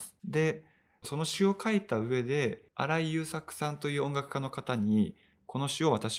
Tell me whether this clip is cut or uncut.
cut